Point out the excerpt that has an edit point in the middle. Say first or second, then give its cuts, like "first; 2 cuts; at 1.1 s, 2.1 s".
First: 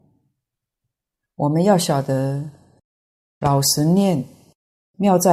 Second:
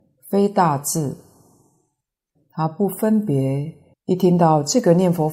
second; 2 cuts; at 2.3 s, 3.9 s